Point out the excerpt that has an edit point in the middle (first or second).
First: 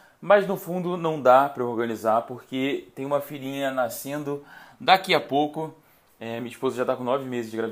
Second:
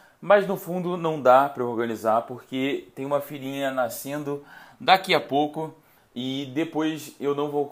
second